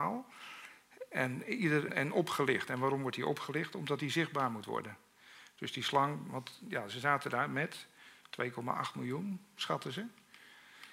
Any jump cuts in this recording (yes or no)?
yes